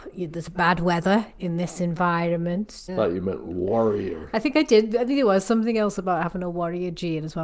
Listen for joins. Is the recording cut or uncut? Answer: cut